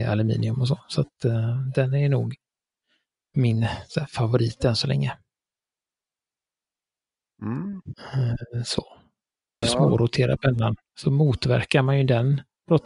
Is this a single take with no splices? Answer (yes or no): no